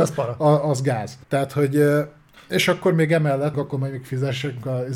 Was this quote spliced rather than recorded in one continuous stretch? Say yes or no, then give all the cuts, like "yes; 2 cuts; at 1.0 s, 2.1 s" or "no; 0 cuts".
yes; 2 cuts; at 1.2 s, 3.5 s